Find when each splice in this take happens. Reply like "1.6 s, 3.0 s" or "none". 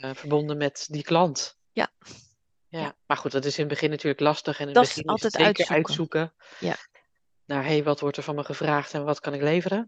3.0 s